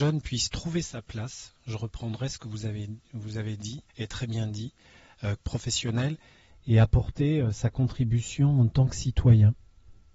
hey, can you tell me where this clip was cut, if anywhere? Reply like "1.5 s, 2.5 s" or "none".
3.9 s, 5.4 s